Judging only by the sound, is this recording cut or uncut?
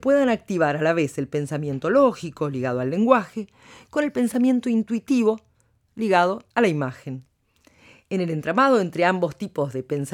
cut